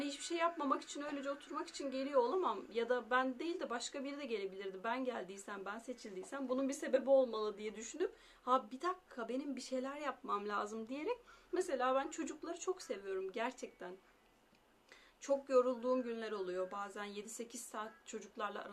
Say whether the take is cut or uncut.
uncut